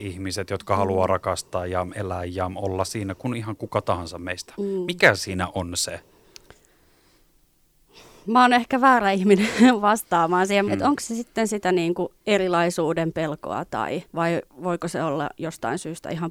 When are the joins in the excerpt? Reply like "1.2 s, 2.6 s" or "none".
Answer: 10.7 s, 12.2 s, 14.1 s